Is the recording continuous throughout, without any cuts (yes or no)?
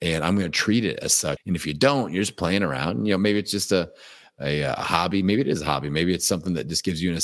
no